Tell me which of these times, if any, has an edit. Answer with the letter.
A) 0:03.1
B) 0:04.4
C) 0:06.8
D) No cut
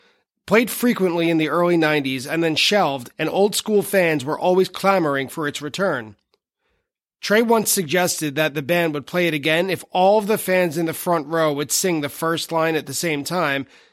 A